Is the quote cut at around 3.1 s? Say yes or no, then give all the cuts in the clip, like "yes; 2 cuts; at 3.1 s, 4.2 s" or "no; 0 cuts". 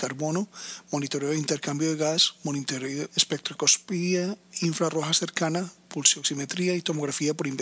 yes; 1 cut; at 3.1 s